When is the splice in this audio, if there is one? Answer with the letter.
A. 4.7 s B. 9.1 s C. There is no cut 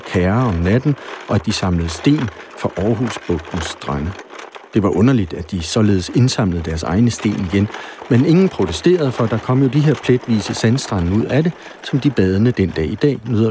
C